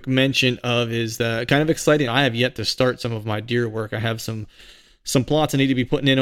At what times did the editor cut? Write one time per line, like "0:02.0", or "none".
0:02.1